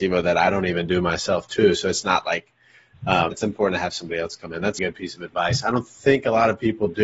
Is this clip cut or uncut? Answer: cut